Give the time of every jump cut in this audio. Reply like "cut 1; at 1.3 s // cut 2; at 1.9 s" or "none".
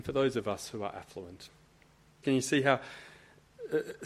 cut 1; at 2.2 s